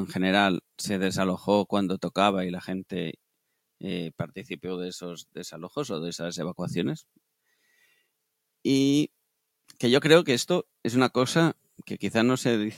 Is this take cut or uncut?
uncut